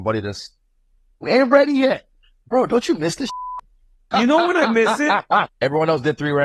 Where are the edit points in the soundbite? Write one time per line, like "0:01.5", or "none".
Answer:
0:04.1
0:05.5

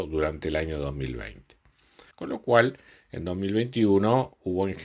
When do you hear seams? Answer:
0:02.1

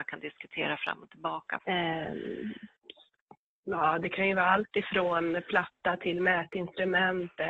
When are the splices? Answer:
0:01.6

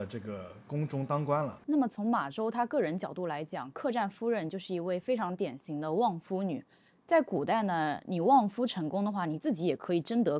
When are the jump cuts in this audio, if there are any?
0:01.6

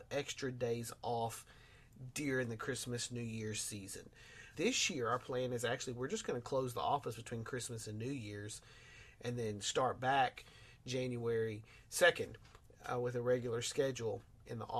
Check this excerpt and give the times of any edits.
0:04.5

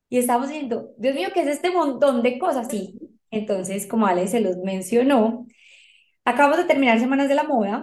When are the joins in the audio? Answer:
0:02.7

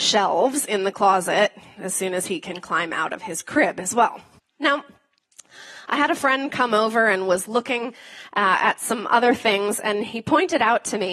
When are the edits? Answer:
0:04.4

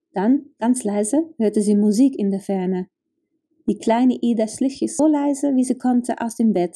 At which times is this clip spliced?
0:05.0

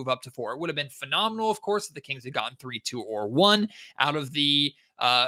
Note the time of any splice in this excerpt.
none

